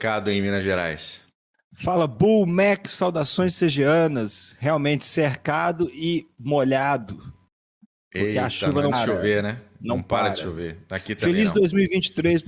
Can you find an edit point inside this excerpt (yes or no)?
yes